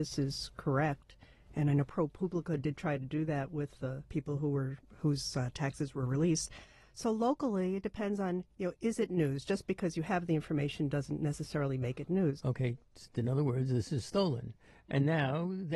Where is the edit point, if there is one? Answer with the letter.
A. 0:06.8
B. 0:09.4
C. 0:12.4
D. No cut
C